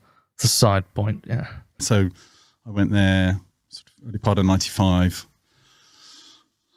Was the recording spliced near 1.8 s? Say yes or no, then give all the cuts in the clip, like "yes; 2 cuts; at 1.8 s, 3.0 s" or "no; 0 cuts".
yes; 1 cut; at 1.8 s